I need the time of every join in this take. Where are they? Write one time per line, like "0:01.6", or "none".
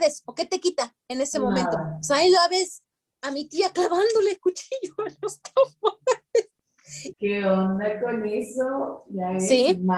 0:07.1